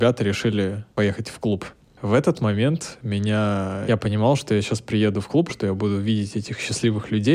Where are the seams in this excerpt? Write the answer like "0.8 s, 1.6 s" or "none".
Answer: 3.9 s, 5.5 s